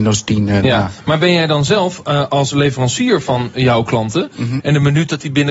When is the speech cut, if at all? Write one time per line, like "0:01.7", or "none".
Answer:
0:04.6